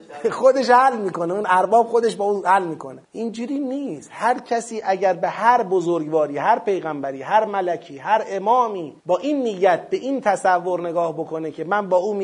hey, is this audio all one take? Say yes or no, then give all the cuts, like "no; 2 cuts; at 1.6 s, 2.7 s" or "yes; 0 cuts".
no; 2 cuts; at 3.0 s, 9.0 s